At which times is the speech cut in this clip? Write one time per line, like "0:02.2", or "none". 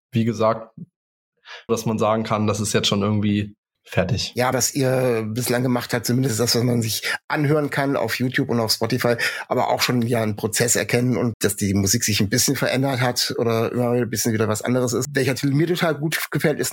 0:01.7
0:04.5